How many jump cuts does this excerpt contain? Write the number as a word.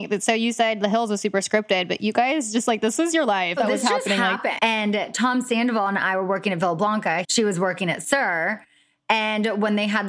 three